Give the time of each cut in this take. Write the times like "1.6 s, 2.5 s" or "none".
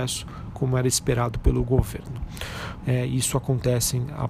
2.8 s